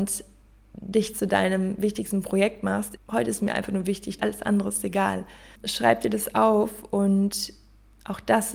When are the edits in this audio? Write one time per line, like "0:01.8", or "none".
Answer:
0:03.0
0:04.2
0:05.6